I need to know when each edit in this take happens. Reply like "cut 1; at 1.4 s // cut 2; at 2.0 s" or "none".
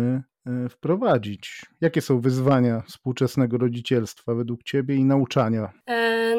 none